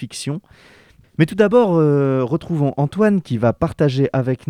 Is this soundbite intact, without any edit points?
no; 1 cut; at 1.0 s

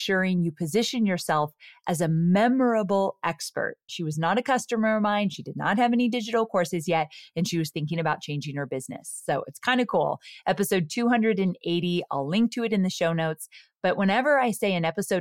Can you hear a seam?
yes; 1 cut; at 3.9 s

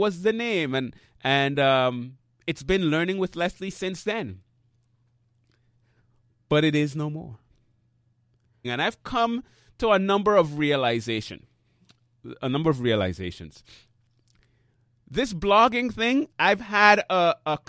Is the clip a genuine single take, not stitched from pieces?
no; 2 cuts; at 8.6 s, 16.3 s

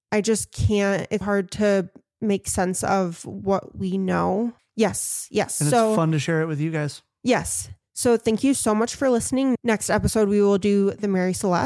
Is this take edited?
yes; 2 cuts; at 1.2 s, 4.6 s

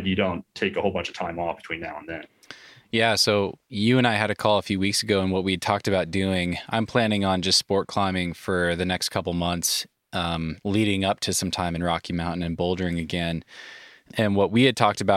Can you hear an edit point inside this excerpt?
yes; 1 cut; at 10.6 s

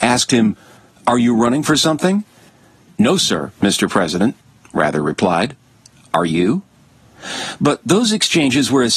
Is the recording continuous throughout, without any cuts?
yes; 0 cuts

